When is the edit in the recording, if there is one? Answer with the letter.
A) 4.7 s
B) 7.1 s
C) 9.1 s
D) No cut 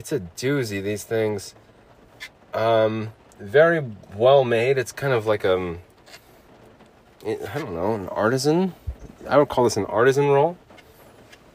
D